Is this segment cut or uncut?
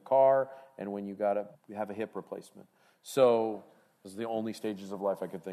cut